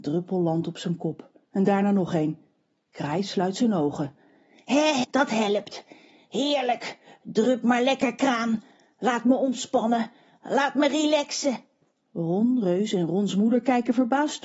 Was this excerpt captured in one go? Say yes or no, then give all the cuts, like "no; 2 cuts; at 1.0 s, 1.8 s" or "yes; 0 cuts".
no; 1 cut; at 5.0 s